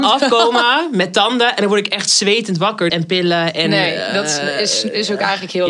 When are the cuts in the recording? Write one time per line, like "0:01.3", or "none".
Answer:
0:02.9